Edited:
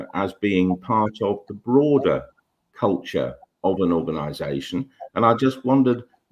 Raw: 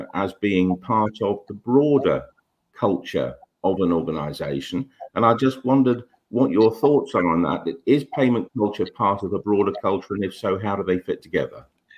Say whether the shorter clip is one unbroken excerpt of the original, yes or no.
yes